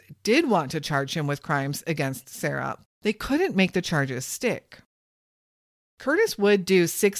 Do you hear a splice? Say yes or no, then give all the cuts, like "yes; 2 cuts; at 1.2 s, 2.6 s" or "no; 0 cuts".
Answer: yes; 1 cut; at 2.8 s